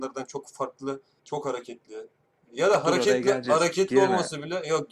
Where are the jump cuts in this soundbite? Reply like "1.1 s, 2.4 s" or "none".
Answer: 1.2 s

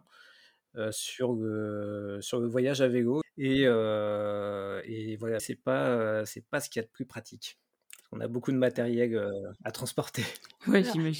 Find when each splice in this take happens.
3.2 s, 5.4 s

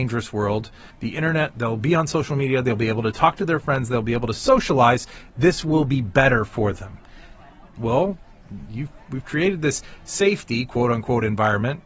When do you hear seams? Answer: 0.9 s, 7.8 s

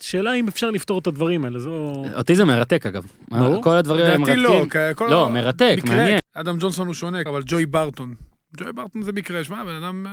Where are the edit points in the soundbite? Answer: 6.2 s, 7.3 s

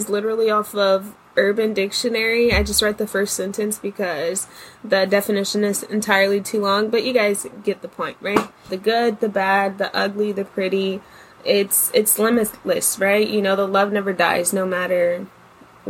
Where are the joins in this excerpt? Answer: 8.7 s

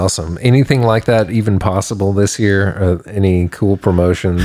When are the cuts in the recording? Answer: none

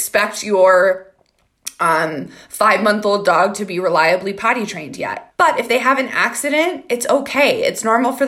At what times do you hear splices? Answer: 5.3 s

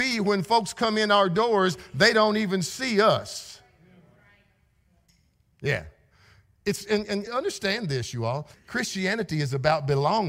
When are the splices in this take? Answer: 7.3 s, 8.5 s

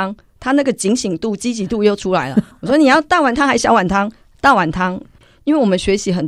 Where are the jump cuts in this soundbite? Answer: 5.0 s

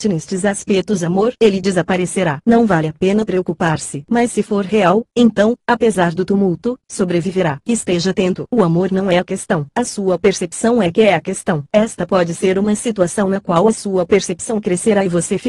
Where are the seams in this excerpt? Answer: 1.4 s

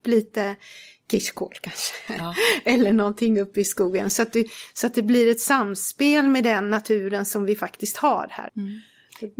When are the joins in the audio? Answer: 8.5 s

